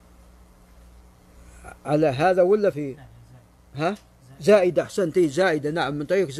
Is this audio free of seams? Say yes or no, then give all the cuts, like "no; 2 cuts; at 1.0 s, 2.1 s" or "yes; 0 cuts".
no; 1 cut; at 2.7 s